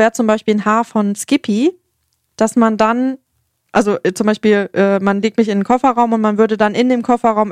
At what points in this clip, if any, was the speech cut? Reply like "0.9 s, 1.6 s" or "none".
none